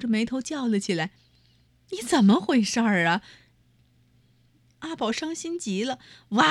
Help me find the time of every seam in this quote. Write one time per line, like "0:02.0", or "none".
0:03.6

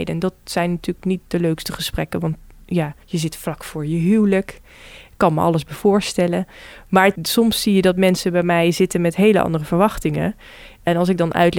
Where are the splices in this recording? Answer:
0:03.0

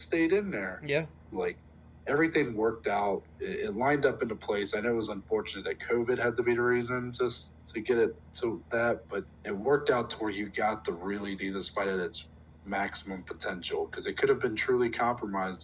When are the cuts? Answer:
0:01.3
0:09.3
0:11.4

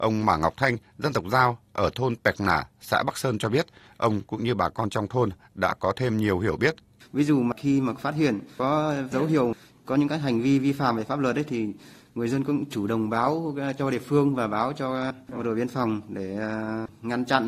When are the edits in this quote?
0:03.9
0:07.0

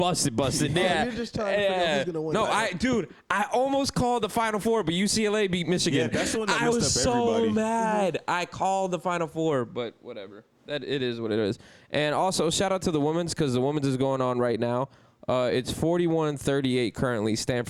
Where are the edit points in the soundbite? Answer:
none

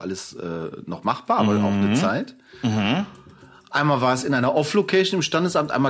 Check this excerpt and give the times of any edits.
none

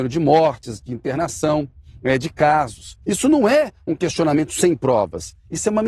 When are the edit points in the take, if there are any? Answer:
0:03.0

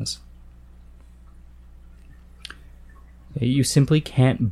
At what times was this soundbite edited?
none

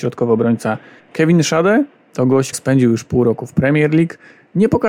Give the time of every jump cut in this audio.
0:01.0
0:02.5

